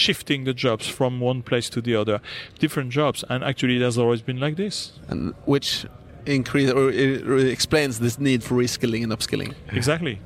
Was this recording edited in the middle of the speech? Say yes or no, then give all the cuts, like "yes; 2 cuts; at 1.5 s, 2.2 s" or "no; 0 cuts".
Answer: no; 0 cuts